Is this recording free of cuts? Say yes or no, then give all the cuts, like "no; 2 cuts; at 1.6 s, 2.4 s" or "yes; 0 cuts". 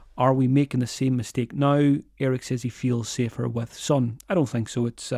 yes; 0 cuts